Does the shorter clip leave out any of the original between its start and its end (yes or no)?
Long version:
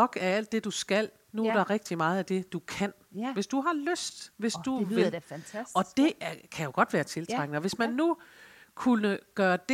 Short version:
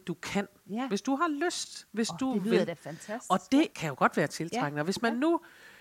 yes